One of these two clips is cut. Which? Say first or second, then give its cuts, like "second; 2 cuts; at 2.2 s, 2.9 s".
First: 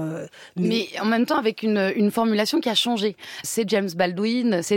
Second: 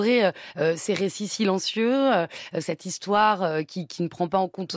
first; 1 cut; at 3.4 s